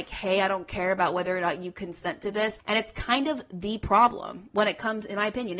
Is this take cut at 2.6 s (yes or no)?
yes